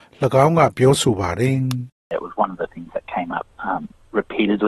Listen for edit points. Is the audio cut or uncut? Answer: uncut